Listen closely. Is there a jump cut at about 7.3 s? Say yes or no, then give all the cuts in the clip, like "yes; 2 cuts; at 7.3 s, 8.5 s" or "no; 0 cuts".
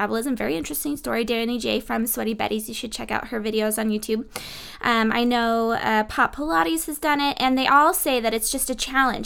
no; 0 cuts